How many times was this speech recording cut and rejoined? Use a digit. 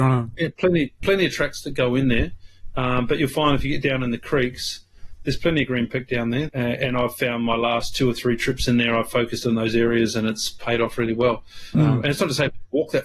2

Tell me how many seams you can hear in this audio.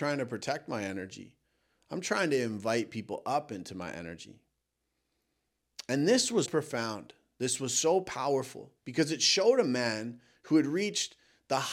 2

